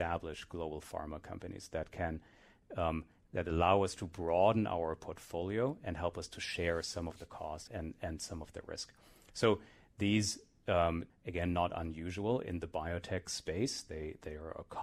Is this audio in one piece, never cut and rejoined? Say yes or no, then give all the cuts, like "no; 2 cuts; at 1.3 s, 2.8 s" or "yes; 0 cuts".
no; 2 cuts; at 7.7 s, 11.1 s